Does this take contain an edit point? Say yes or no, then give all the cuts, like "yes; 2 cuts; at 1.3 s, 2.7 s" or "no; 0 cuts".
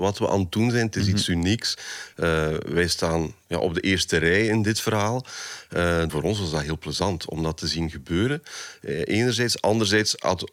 yes; 1 cut; at 6.1 s